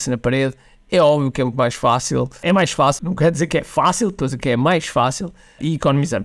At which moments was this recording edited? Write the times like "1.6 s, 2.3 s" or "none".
none